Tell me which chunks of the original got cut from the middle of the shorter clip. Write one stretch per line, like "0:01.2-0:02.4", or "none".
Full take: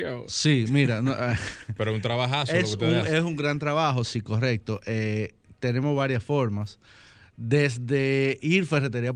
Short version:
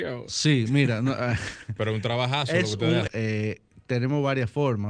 0:03.1-0:04.8